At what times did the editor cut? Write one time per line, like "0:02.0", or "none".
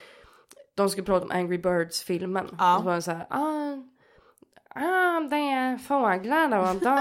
none